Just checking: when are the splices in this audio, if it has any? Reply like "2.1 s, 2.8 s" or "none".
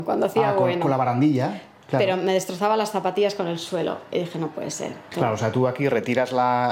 5.1 s